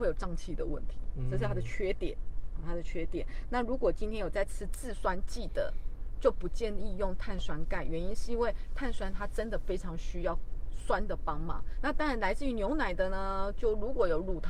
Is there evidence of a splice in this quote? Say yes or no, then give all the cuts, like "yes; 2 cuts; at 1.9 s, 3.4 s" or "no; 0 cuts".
yes; 1 cut; at 11.8 s